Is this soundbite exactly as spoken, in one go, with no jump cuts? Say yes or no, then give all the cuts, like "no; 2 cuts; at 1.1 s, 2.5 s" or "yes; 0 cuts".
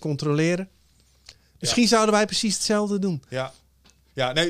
yes; 0 cuts